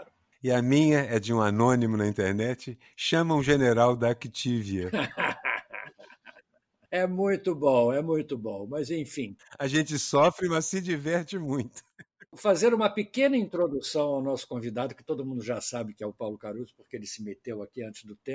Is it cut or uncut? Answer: uncut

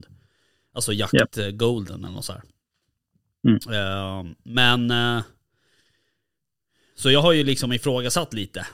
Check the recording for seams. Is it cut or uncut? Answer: uncut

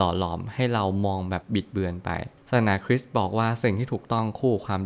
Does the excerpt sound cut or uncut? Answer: cut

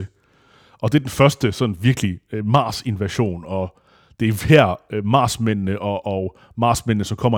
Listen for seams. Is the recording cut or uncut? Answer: uncut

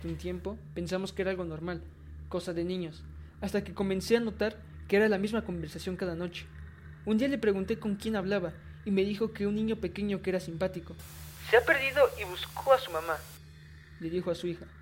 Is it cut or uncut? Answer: uncut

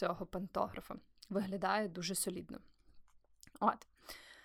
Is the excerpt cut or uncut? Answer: uncut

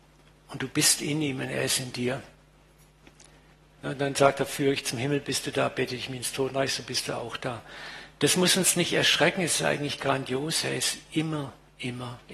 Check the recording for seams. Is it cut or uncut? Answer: uncut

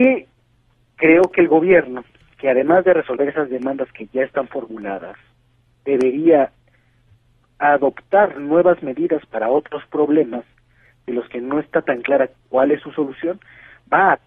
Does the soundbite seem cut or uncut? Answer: uncut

